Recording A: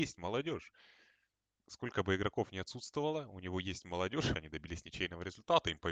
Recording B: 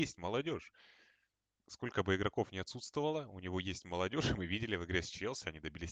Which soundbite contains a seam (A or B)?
A